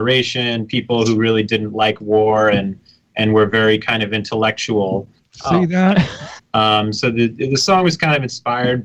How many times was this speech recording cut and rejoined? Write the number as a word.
two